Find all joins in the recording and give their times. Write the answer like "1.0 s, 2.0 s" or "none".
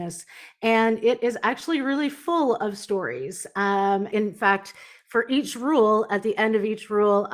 4.1 s